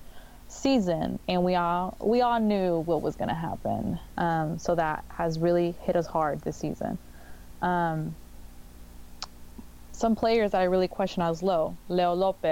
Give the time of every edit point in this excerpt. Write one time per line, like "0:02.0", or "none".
0:04.1